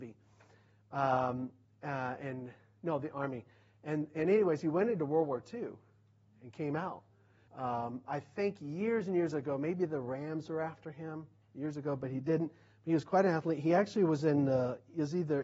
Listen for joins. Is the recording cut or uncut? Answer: cut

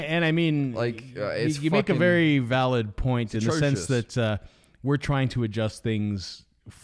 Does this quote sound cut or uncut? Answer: uncut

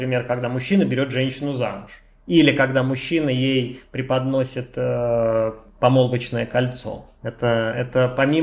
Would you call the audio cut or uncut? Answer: uncut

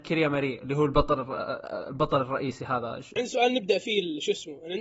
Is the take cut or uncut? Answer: cut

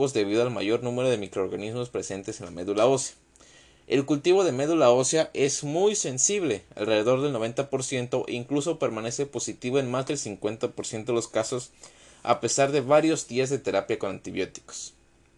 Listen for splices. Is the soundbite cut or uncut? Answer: uncut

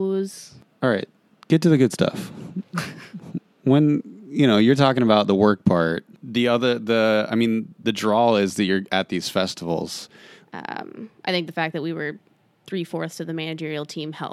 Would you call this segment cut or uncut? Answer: cut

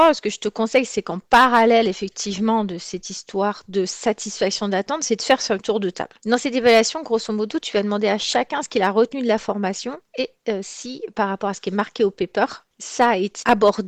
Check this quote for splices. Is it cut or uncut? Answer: cut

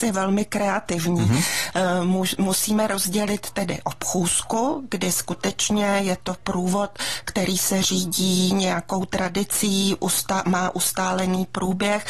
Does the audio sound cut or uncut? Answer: uncut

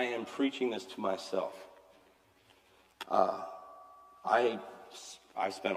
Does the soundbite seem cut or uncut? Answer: uncut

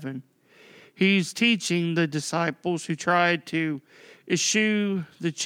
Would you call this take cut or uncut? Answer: uncut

